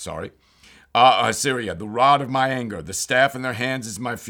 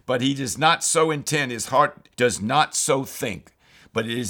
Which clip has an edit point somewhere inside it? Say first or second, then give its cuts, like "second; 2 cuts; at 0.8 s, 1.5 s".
second; 1 cut; at 2.1 s